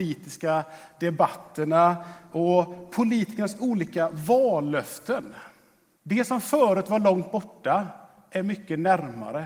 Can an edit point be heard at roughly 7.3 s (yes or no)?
no